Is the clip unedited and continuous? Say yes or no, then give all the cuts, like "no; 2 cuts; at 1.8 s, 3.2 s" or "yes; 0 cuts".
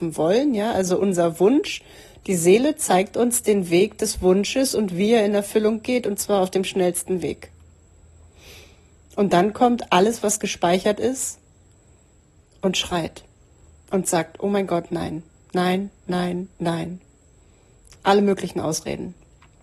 yes; 0 cuts